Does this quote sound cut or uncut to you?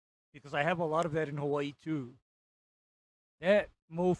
uncut